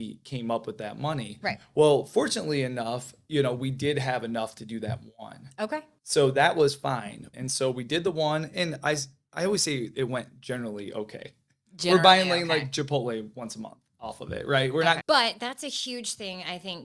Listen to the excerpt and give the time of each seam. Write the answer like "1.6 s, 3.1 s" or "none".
7.3 s, 15.0 s